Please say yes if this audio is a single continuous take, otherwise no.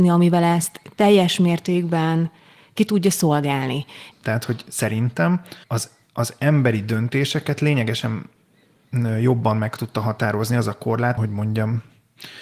no